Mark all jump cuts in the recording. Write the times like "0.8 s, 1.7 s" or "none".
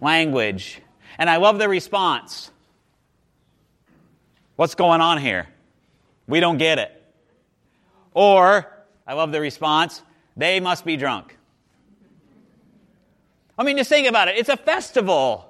none

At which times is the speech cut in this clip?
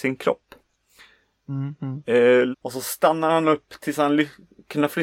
2.5 s

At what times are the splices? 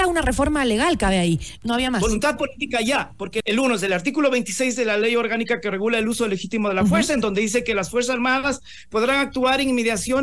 1.6 s, 3.4 s

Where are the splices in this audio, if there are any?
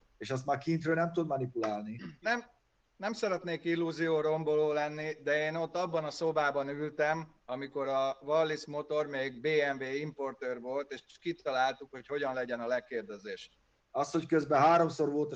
2.2 s, 13.8 s

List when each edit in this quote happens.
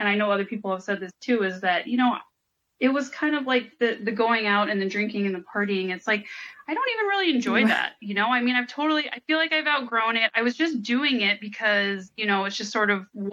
none

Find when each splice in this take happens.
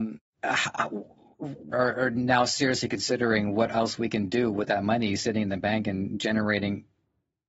1.7 s

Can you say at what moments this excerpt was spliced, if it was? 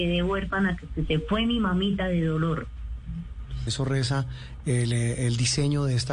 3.7 s

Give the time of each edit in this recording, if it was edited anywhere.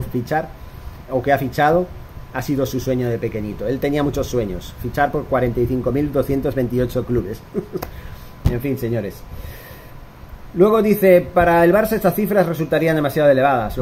1.1 s

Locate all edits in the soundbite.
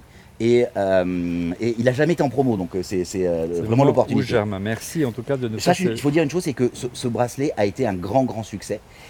none

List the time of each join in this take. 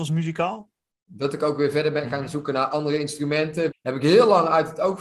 1.1 s, 3.7 s

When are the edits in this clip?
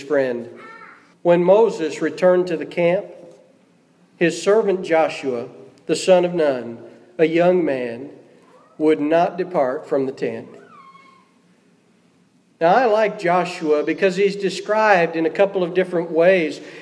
1.1 s

